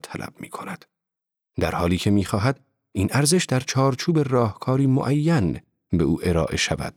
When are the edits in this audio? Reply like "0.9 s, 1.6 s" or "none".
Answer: none